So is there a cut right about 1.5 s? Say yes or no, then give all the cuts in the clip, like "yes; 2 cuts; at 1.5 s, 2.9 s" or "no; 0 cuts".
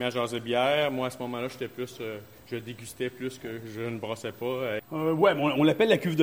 no; 1 cut; at 4.8 s